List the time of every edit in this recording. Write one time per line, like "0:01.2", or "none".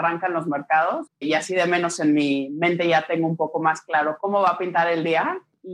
0:01.1